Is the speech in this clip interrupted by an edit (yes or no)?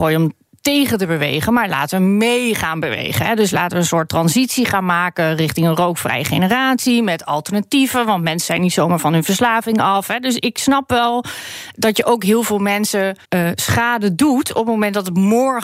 yes